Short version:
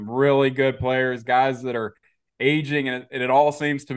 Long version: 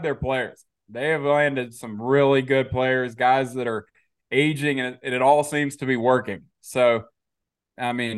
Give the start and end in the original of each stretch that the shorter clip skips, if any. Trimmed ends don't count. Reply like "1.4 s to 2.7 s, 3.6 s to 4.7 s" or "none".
none